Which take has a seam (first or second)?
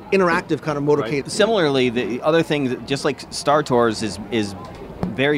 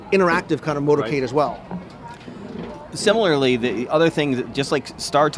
first